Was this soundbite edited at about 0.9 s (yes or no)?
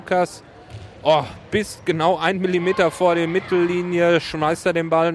no